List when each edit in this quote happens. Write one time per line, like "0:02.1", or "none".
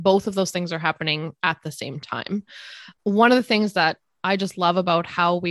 none